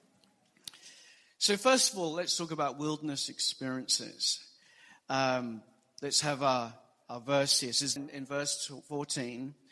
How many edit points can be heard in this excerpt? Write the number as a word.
one